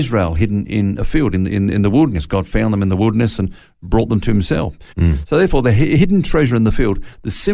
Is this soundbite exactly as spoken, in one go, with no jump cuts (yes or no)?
no